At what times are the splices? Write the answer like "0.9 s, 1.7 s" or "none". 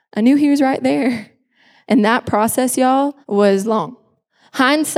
1.9 s, 3.2 s